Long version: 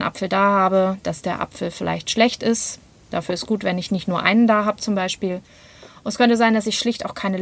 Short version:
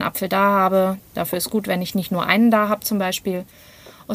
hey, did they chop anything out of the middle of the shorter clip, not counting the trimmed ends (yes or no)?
yes